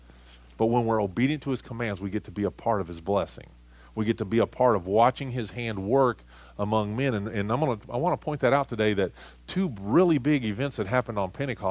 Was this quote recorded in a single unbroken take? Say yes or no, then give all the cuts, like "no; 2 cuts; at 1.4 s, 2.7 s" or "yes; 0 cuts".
yes; 0 cuts